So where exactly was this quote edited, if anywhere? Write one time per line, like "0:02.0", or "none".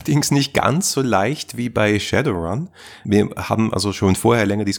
none